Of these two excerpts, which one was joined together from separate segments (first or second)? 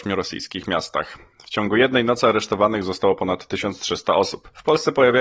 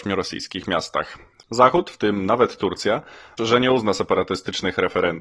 second